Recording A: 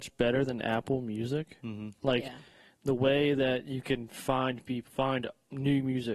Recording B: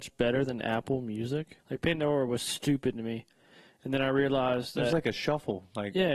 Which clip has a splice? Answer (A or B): B